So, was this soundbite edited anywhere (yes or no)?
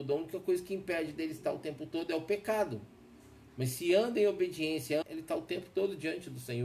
yes